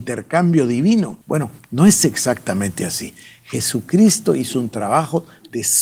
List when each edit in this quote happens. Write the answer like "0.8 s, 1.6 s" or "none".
1.2 s